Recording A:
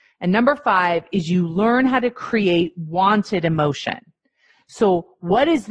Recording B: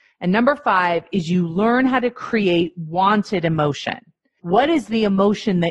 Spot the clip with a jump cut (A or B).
B